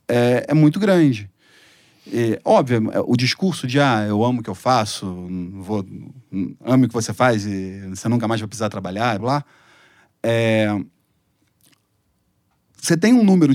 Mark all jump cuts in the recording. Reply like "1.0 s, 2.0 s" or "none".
9.2 s